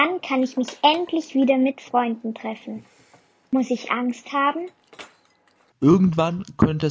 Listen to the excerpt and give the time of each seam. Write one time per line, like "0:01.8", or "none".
0:05.7